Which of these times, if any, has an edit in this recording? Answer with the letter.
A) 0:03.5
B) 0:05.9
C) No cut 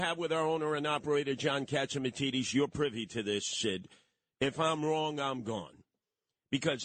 A